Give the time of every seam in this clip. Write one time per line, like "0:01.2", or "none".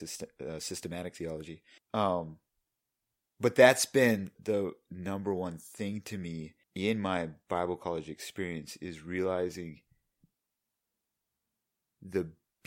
0:01.8
0:04.4
0:06.6